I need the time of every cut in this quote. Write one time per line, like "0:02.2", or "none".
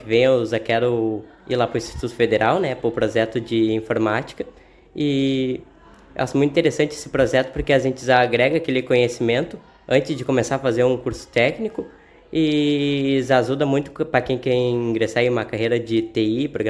none